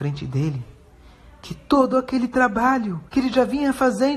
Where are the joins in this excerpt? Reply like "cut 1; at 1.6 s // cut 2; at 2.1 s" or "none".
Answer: cut 1; at 3.1 s